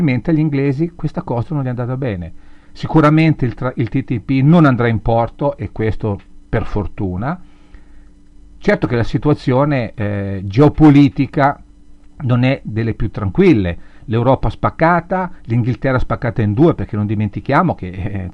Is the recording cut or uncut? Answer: uncut